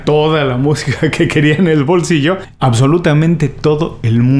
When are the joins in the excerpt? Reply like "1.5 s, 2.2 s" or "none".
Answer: 2.6 s